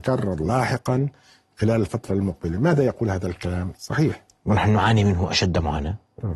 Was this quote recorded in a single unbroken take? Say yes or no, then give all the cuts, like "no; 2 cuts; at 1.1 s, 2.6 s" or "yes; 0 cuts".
no; 1 cut; at 3.7 s